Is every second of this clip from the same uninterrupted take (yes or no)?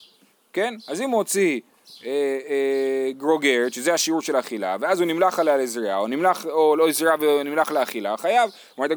yes